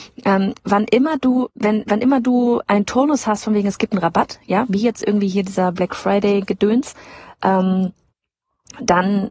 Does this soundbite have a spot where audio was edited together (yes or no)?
no